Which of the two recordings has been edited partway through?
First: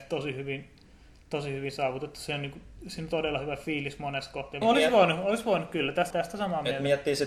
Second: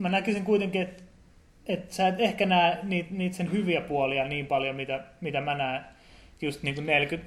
first; 2 cuts; at 4.6 s, 6.1 s

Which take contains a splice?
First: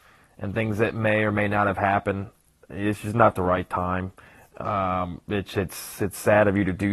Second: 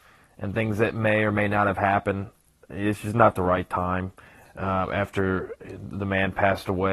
second; 1 cut; at 4.4 s

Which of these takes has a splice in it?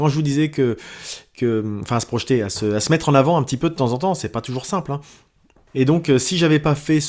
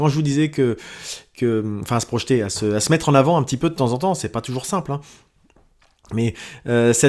first; 1 cut; at 5.7 s

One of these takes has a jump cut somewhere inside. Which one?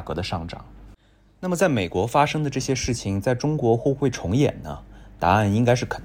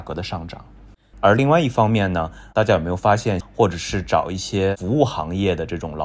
second; 2 cuts; at 1.1 s, 3.4 s

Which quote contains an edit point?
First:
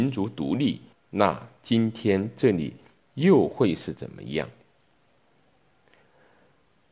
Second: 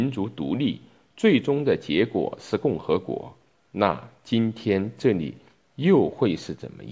first; 1 cut; at 0.9 s

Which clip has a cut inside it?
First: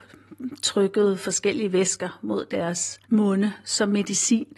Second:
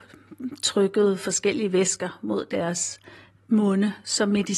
first; 1 cut; at 3.0 s

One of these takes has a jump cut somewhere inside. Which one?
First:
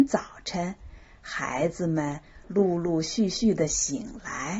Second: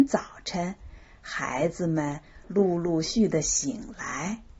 second; 1 cut; at 3.0 s

